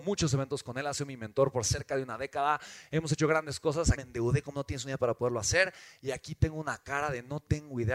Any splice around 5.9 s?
no; 1 cut; at 3.9 s

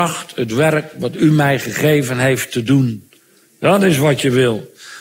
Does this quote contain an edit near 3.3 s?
no; 0 cuts

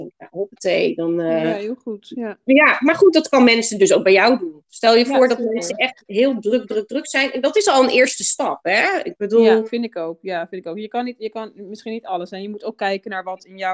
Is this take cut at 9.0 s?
no; 0 cuts

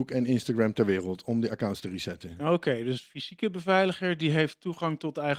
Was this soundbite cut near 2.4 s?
no; 0 cuts

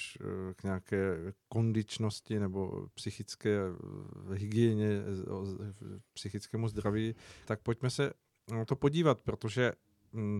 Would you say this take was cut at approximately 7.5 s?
yes; 1 cut; at 7.5 s

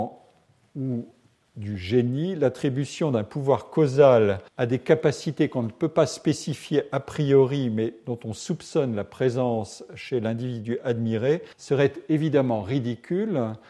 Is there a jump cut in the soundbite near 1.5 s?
no; 2 cuts; at 4.5 s, 11.5 s

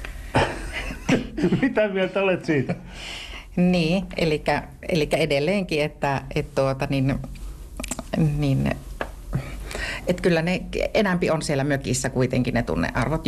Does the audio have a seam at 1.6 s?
no; 0 cuts

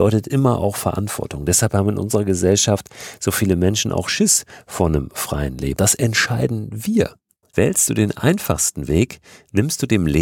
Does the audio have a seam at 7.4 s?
yes; 2 cuts; at 5.8 s, 7.4 s

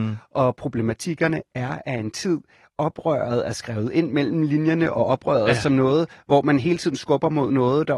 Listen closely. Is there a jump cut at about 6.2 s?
no; 0 cuts

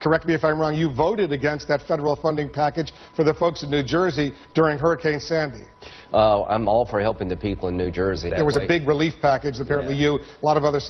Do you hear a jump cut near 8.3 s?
yes; 1 cut; at 8.3 s

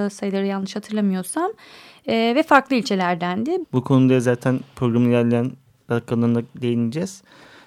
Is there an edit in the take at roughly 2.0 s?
no; 1 cut; at 3.6 s

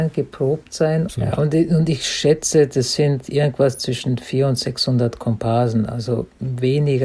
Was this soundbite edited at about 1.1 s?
yes; 1 cut; at 1.1 s

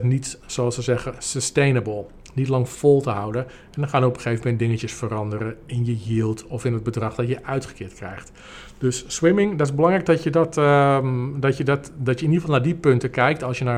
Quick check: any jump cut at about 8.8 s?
no; 0 cuts

